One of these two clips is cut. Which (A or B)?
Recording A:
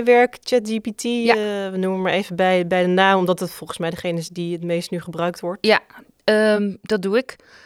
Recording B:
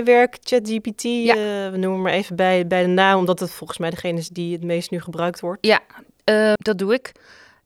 B